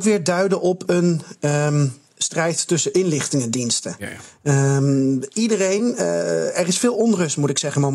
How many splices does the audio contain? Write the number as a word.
zero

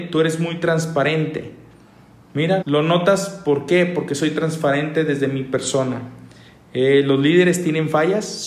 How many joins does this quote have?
one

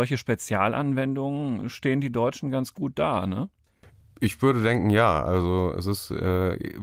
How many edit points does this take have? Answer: zero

